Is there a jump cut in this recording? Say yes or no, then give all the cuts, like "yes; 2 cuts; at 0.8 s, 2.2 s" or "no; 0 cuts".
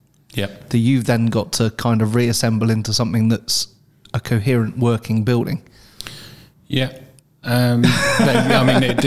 no; 0 cuts